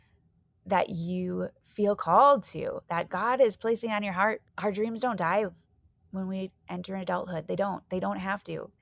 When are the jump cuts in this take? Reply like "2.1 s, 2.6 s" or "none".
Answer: 4.4 s